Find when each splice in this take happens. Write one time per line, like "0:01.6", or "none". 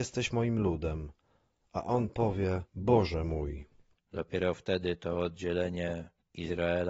0:02.7